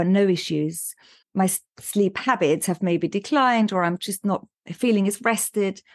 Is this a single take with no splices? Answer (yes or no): no